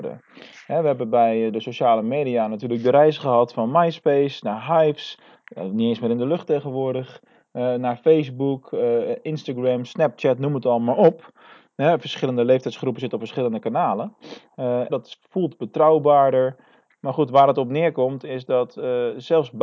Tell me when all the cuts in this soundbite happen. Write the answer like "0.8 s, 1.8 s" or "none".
14.9 s, 16.9 s